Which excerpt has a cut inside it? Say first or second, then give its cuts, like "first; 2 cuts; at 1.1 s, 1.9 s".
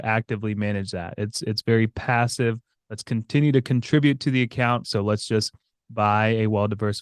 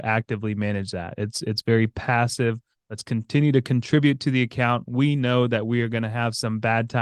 first; 1 cut; at 4.8 s